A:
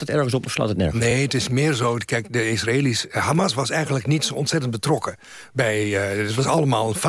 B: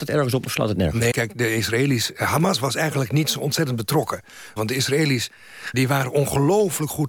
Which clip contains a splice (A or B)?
B